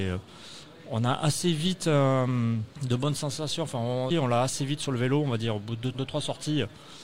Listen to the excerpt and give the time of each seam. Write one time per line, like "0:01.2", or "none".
0:02.7
0:04.1
0:05.9